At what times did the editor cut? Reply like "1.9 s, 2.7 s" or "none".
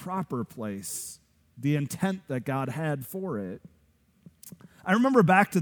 none